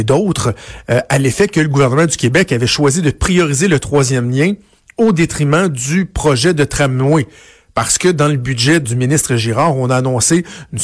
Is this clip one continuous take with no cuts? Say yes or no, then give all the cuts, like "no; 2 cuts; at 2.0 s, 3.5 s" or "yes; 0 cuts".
no; 1 cut; at 8.8 s